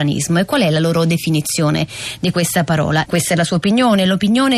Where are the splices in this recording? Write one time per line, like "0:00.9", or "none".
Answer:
0:03.0